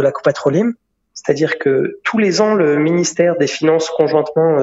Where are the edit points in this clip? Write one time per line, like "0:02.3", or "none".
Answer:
0:01.0